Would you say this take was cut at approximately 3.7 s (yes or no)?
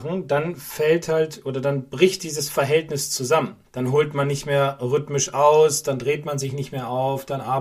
yes